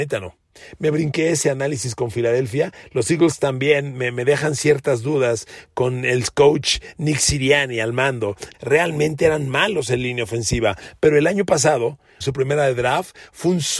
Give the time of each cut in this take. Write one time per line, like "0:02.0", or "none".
0:08.5
0:12.2